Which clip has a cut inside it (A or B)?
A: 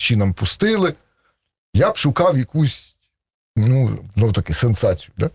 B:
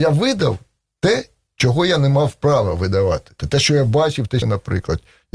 B